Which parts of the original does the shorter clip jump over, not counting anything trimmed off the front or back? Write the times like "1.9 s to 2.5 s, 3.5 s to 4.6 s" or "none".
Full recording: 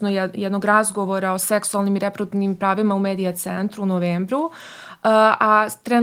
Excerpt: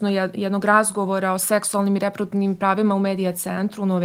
none

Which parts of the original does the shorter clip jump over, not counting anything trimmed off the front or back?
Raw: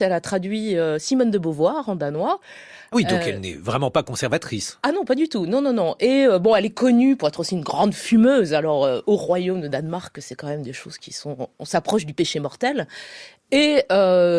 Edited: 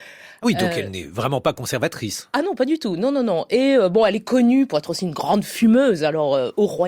none

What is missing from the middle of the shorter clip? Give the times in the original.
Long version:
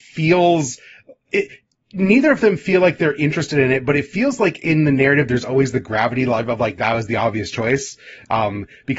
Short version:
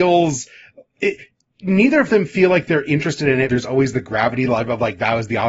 3.8 s to 5.3 s

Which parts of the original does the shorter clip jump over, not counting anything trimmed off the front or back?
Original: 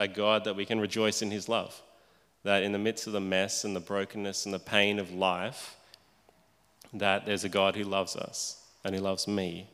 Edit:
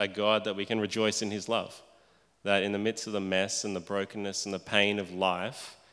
none

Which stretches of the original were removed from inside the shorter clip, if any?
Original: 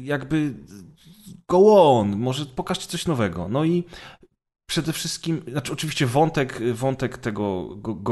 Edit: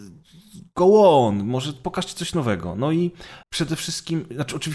4.2 s to 4.6 s

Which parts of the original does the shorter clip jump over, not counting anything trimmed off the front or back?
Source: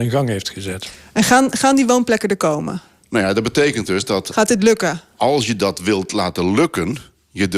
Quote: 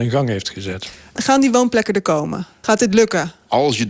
1.2 s to 1.5 s, 3.0 s to 4.3 s

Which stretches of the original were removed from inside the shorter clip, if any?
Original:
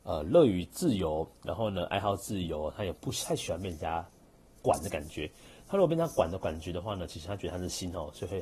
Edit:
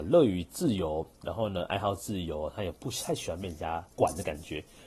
4.1 s to 4.6 s

